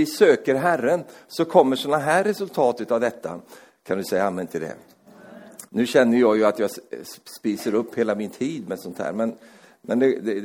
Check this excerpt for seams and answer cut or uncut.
cut